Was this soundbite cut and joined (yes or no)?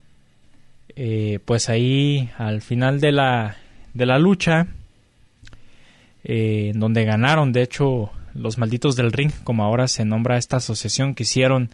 no